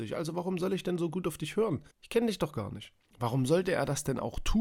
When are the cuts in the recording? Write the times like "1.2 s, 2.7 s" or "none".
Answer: 1.9 s, 3.1 s